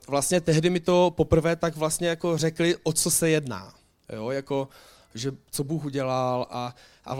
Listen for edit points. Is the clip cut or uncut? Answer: uncut